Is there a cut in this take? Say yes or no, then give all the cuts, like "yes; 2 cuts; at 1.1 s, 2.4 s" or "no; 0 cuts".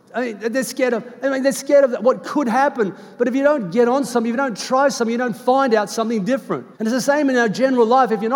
yes; 1 cut; at 6.7 s